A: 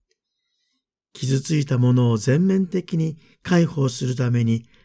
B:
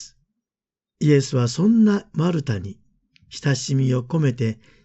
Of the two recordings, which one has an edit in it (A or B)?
B